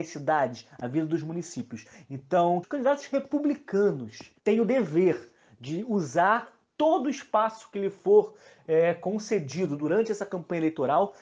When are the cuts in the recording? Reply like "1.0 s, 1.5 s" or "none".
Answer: 2.6 s, 4.4 s